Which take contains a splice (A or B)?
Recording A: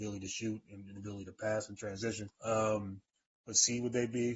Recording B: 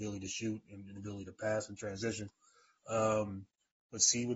A